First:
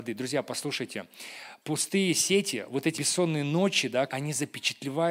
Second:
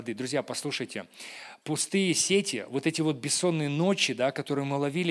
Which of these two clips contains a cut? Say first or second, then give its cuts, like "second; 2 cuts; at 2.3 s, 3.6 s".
first; 2 cuts; at 2.9 s, 4.1 s